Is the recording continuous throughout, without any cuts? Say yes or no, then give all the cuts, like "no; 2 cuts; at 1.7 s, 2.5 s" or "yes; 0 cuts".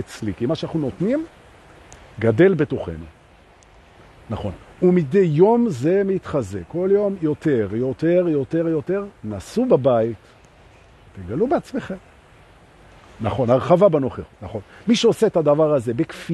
no; 1 cut; at 14.3 s